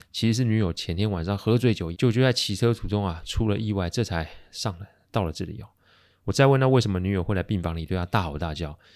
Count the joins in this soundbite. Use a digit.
1